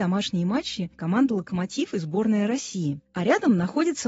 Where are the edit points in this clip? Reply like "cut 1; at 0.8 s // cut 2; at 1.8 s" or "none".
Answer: cut 1; at 0.9 s